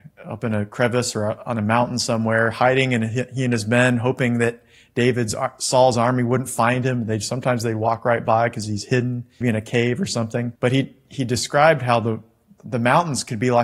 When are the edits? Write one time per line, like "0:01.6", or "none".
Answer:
0:09.4
0:10.5